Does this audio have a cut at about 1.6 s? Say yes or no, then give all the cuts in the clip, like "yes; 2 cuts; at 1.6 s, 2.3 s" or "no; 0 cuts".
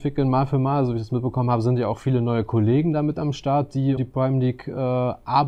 no; 1 cut; at 4.0 s